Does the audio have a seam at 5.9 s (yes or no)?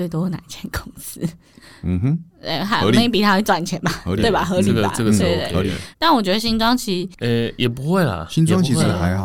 yes